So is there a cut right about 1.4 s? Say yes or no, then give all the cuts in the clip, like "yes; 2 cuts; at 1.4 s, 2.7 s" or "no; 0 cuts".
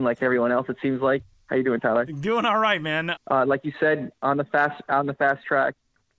no; 1 cut; at 3.1 s